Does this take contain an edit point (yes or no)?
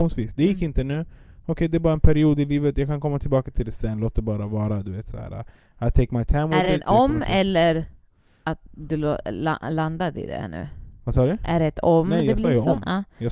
no